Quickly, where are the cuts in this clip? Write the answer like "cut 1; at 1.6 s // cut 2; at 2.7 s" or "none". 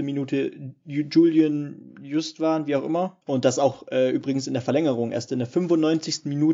cut 1; at 3.2 s